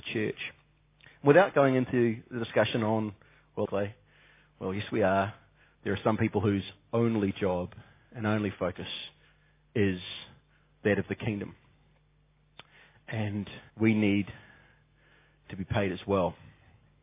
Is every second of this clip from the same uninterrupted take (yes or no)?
no